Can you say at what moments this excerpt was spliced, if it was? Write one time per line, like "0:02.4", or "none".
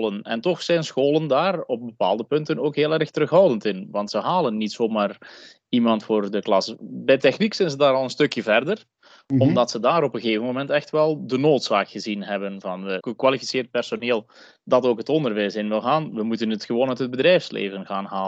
0:13.0